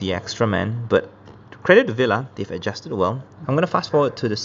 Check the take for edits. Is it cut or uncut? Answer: cut